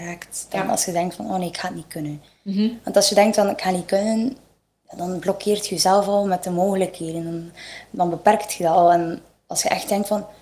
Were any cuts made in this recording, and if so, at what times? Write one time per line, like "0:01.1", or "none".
none